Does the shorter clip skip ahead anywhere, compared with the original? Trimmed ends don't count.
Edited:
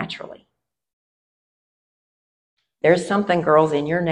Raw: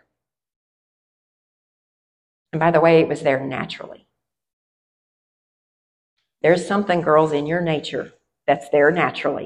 no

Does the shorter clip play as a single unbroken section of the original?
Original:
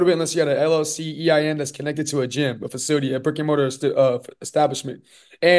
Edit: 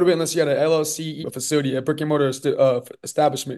no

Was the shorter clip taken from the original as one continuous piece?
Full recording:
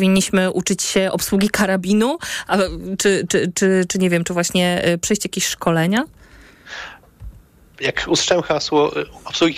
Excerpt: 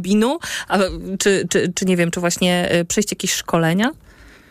no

